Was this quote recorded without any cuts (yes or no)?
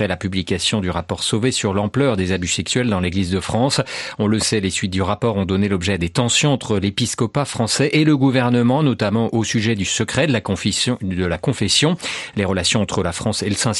yes